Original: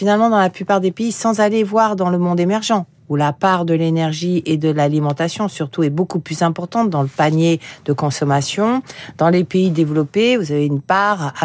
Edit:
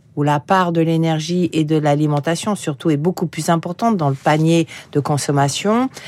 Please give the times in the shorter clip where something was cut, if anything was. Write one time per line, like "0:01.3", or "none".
none